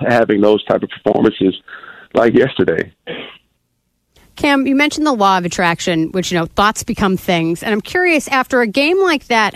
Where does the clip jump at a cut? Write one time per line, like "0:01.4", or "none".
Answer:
none